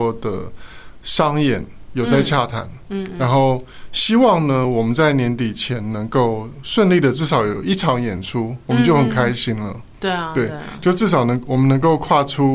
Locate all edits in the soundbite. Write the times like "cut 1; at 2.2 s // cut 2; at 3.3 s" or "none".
none